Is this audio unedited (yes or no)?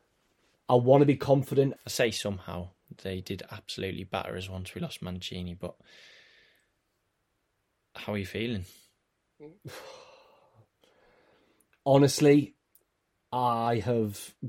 no